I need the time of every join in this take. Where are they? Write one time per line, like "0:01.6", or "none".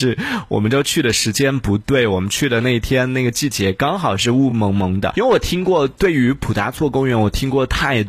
none